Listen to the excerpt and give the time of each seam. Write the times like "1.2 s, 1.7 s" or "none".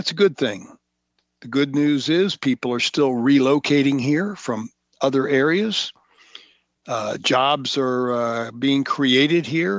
none

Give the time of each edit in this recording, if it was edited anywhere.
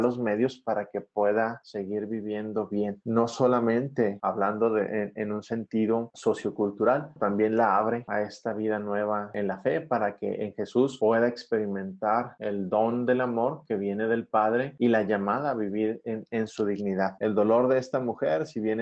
7.2 s, 17.2 s

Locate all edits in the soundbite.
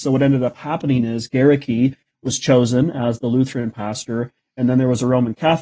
none

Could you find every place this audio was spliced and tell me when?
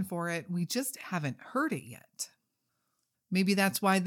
3.1 s

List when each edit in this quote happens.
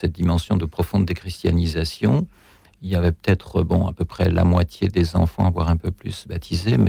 none

